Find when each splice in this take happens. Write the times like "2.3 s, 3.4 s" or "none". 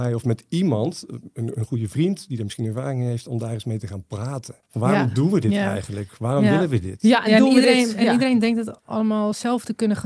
4.6 s

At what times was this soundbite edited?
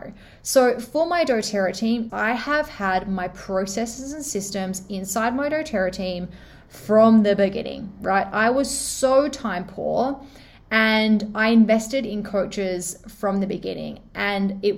2.1 s

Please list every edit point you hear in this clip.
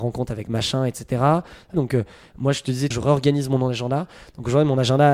1.7 s, 2.9 s

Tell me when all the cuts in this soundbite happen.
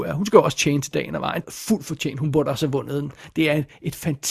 1.4 s

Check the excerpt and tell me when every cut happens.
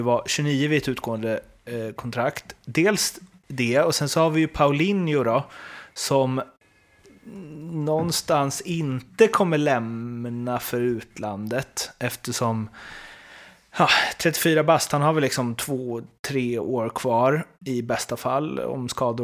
17.5 s

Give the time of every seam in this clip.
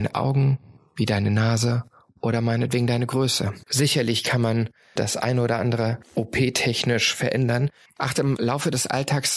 3.6 s, 5.0 s, 7.9 s

